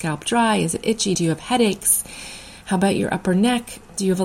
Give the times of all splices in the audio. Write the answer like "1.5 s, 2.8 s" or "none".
none